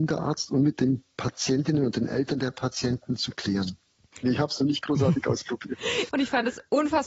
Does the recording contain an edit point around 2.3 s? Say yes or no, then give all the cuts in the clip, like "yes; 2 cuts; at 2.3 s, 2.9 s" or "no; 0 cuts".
no; 2 cuts; at 4.2 s, 6.1 s